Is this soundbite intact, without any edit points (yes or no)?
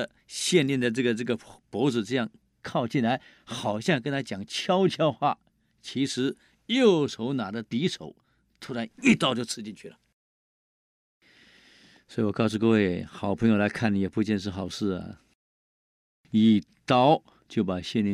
yes